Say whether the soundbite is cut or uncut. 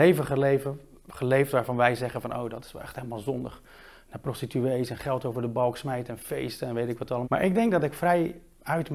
cut